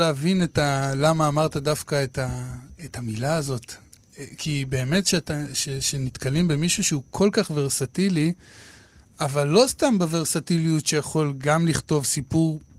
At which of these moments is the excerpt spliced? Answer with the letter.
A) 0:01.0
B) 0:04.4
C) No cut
B